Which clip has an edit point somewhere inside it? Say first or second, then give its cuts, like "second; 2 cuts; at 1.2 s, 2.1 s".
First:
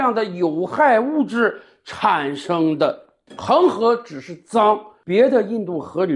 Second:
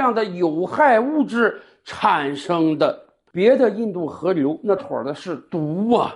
second; 2 cuts; at 3.3 s, 4.8 s